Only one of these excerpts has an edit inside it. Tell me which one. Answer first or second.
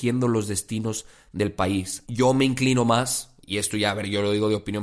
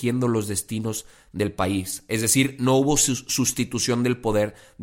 first